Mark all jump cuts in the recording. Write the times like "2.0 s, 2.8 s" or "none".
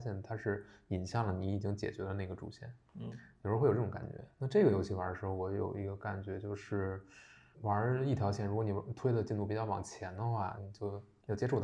7.5 s, 10.6 s